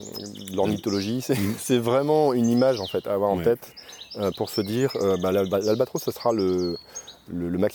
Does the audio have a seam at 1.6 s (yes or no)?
no